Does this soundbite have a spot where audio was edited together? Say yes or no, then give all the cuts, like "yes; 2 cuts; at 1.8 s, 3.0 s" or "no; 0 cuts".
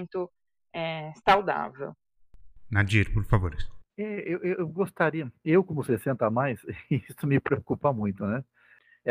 yes; 1 cut; at 3.9 s